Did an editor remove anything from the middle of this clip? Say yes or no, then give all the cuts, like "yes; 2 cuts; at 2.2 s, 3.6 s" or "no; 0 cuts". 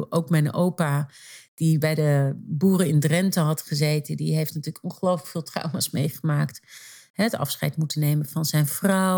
no; 0 cuts